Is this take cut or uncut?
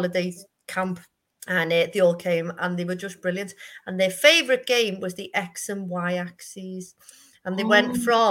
uncut